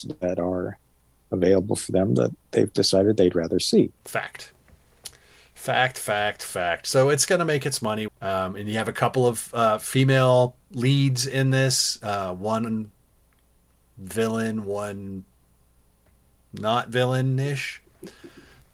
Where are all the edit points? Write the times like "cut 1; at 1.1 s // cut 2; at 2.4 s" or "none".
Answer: cut 1; at 8.1 s